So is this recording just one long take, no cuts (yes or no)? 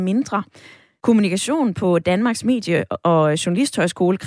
no